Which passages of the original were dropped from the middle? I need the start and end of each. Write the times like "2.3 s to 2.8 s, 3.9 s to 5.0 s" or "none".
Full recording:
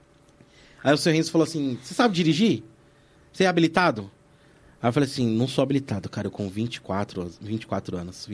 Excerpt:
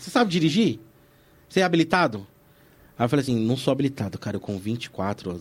5.1 s to 5.2 s